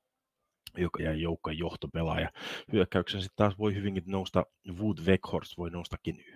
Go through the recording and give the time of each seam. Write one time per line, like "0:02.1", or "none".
0:01.0